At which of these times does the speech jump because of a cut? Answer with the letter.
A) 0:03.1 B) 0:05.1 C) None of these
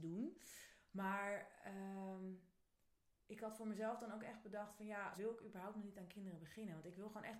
B